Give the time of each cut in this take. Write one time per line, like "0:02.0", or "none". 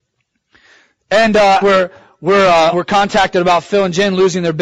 0:01.6
0:02.7